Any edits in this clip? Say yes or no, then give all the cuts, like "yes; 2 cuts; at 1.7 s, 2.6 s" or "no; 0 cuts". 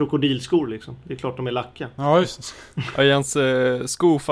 no; 0 cuts